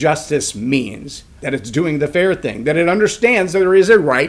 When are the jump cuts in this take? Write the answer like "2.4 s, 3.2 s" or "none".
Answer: 1.4 s